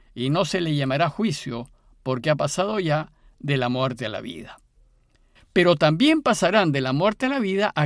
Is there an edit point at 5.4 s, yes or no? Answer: yes